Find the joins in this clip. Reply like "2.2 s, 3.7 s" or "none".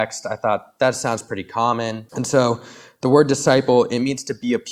2.1 s